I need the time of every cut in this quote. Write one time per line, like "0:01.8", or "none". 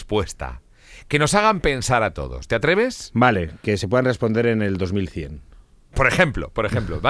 none